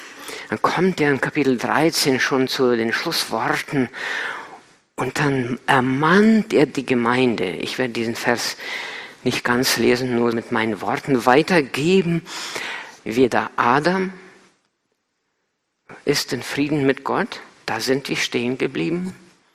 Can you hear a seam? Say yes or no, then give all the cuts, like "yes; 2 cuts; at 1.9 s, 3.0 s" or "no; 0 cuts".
yes; 2 cuts; at 10.3 s, 13.0 s